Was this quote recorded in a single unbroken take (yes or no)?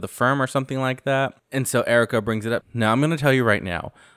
no